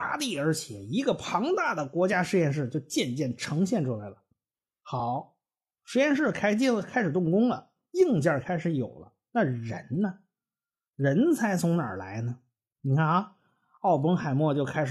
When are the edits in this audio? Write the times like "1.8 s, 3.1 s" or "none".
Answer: none